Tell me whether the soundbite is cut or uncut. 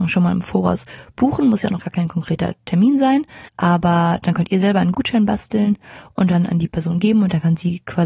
uncut